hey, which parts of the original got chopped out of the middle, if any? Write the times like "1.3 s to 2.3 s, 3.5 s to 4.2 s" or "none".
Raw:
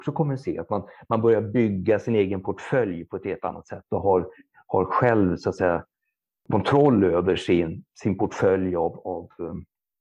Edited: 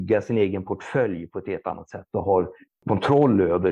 4.4 s to 6.3 s